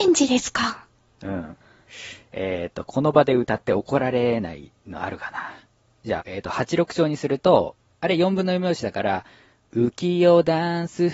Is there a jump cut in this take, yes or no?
yes